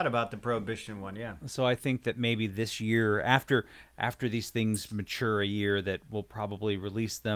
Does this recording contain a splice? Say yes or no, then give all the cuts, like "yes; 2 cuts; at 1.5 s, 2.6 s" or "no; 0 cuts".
no; 0 cuts